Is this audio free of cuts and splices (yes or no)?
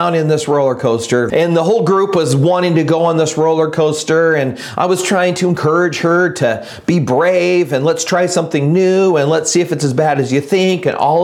no